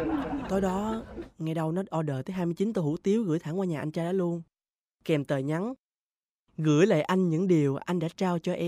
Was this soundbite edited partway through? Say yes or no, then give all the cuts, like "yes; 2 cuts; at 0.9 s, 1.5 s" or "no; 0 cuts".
no; 0 cuts